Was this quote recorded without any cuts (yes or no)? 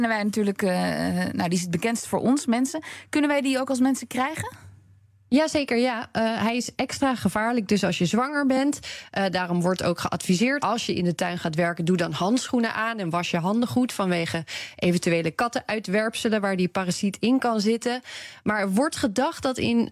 no